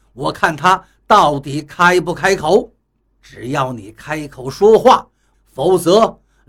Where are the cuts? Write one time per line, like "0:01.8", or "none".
0:03.2
0:05.3